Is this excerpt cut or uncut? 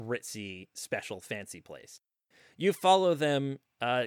uncut